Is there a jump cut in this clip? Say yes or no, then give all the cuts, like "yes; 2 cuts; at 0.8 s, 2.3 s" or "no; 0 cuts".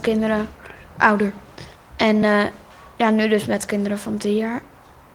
no; 0 cuts